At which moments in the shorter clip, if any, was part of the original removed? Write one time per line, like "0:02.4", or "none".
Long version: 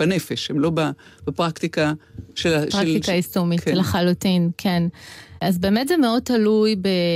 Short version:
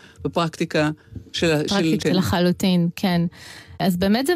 0:02.0